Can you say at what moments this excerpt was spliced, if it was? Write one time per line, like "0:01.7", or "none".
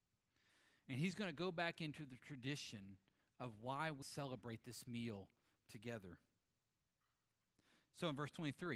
0:04.0

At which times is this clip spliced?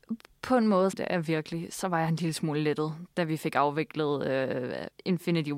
0:00.9

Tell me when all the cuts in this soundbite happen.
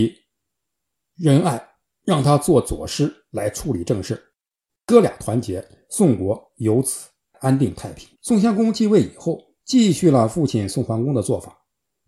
0:08.1
0:09.6

